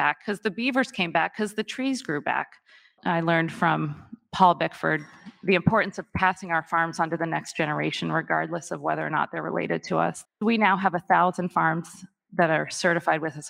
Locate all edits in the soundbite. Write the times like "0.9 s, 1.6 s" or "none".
3.0 s, 10.2 s